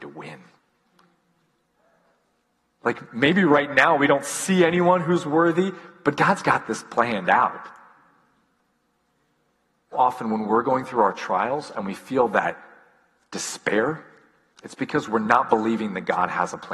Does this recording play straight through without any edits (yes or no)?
no